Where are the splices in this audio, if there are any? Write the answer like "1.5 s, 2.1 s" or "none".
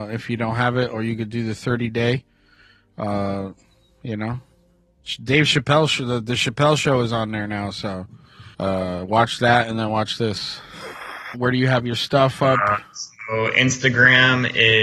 8.5 s, 11.3 s

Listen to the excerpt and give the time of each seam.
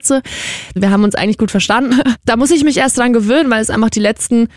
1.9 s

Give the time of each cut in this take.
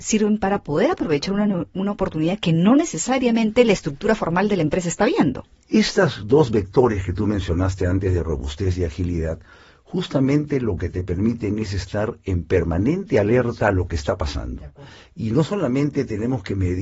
none

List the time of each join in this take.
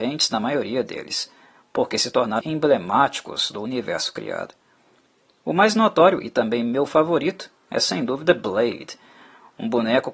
2.4 s

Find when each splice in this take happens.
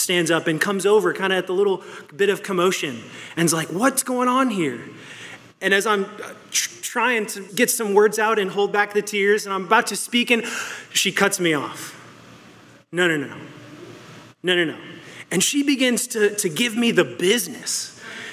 7.5 s

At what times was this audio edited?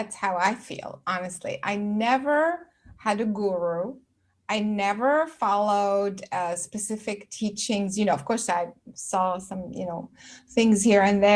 none

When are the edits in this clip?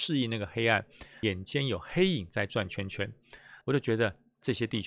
3.6 s

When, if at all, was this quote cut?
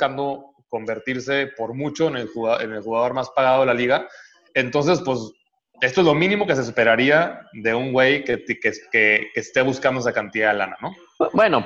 5.7 s

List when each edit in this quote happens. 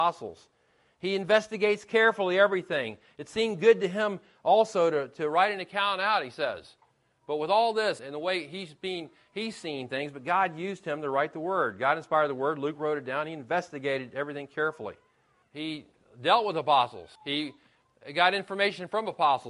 8.0 s, 15.4 s, 17.2 s

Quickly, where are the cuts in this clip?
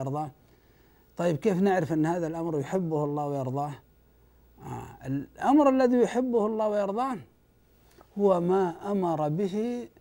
none

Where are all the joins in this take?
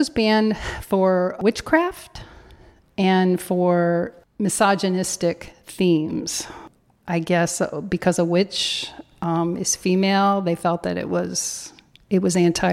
none

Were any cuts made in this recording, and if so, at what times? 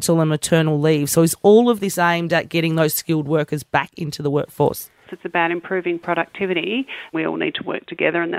5.1 s, 7.1 s

